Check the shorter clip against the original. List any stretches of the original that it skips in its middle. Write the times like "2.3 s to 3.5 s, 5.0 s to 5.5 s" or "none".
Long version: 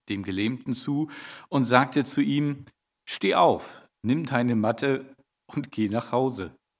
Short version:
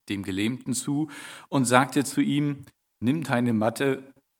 2.9 s to 4.0 s

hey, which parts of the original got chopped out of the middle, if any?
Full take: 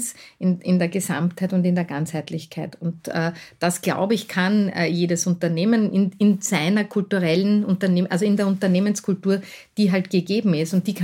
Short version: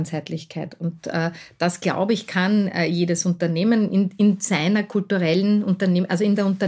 none

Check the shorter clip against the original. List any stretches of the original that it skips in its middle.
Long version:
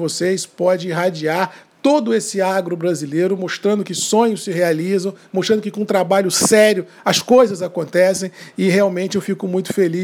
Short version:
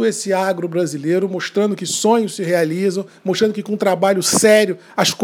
none

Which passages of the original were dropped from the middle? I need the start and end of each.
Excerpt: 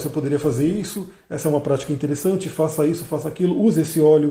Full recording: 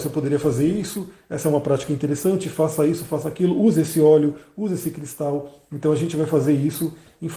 none

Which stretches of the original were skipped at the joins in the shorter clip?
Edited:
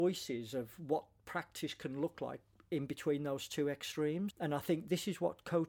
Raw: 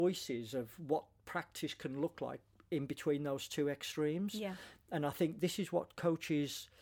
4.3 s to 4.8 s

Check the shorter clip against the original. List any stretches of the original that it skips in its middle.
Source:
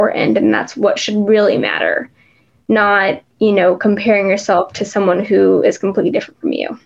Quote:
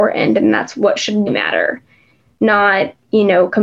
1.3 s to 1.5 s

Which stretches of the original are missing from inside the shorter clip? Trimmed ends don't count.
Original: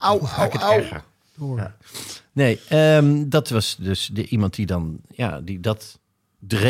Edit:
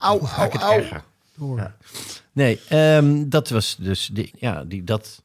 4.3 s to 5.0 s

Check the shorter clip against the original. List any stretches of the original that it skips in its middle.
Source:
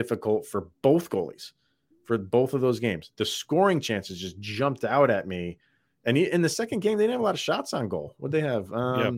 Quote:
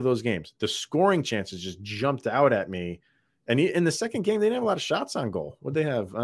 none

